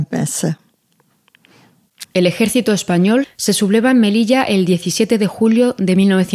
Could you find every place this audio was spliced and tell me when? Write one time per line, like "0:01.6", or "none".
0:02.0
0:03.2